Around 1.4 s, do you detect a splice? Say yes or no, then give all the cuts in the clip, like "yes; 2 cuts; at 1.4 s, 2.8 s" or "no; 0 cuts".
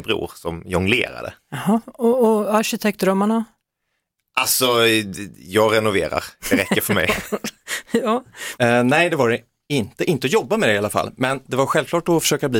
no; 1 cut; at 8.6 s